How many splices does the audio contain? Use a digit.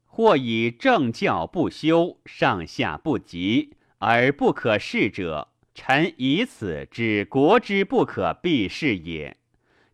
1